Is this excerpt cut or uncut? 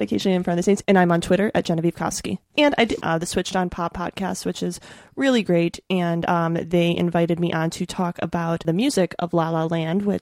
cut